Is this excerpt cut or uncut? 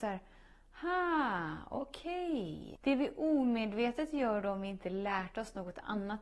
cut